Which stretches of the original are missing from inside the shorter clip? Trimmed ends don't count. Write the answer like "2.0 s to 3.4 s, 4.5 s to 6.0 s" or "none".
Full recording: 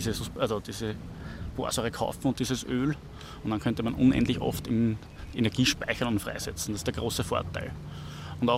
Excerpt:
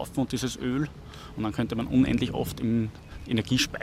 none